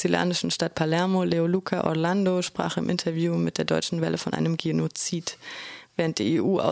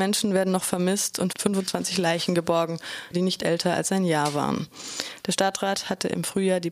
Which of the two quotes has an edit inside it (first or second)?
second